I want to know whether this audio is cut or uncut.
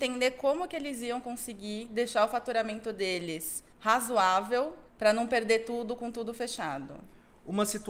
cut